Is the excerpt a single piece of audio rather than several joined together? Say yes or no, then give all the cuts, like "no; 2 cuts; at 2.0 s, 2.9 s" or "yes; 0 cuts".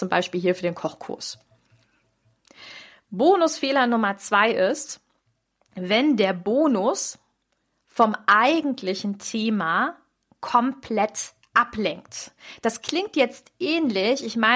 yes; 0 cuts